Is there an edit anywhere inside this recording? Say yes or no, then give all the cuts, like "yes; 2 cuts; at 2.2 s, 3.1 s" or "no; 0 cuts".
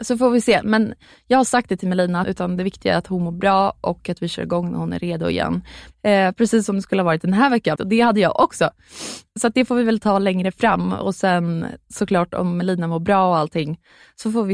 yes; 3 cuts; at 2.2 s, 5.9 s, 7.8 s